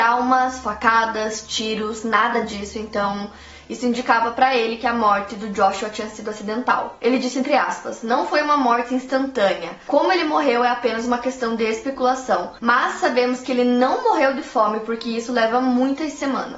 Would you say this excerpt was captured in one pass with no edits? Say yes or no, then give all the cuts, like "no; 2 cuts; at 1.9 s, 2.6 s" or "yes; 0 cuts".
yes; 0 cuts